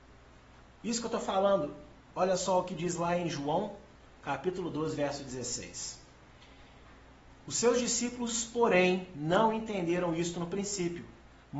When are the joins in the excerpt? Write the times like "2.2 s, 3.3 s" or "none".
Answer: none